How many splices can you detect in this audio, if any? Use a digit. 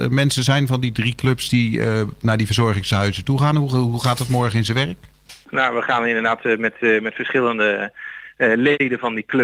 1